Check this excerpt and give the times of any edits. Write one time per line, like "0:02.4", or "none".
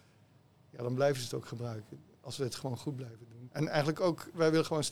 0:03.5